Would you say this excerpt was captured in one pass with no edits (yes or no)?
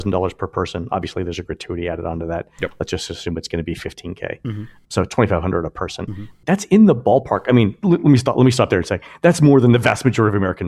yes